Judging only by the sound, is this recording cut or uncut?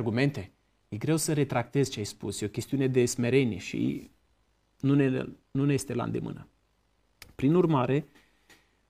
uncut